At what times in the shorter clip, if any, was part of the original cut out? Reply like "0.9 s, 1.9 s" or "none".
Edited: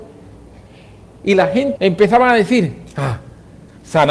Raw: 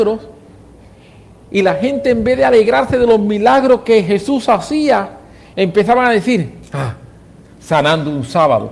1.7 s